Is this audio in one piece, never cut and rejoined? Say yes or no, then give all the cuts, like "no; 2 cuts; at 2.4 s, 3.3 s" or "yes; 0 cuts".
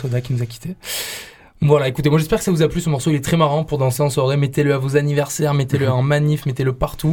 yes; 0 cuts